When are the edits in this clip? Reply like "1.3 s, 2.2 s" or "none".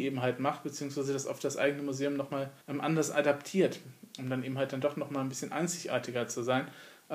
2.6 s